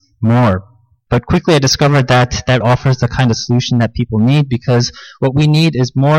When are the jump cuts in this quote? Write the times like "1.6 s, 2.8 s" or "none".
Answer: 1.1 s, 2.6 s

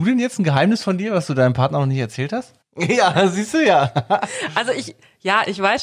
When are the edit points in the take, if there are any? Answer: none

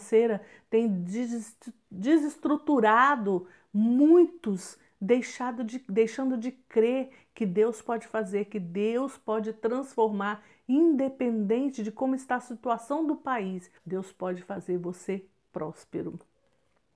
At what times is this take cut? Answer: 13.8 s

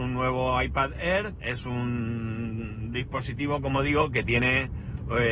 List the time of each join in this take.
none

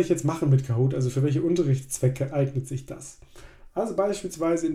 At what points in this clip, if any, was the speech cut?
none

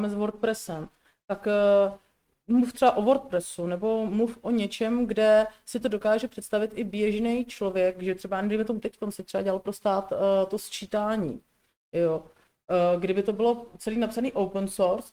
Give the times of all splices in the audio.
none

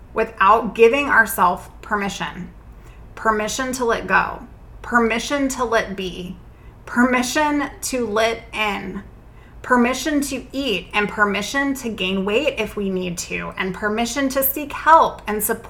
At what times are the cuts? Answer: none

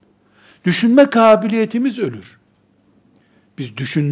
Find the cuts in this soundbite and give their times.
none

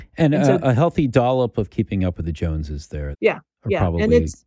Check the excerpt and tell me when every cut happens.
3.1 s

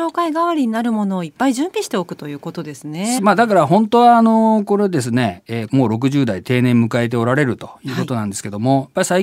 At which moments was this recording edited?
3.2 s, 5.7 s

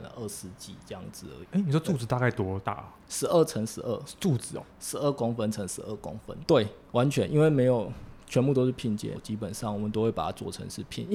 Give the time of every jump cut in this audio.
6.4 s, 9.1 s

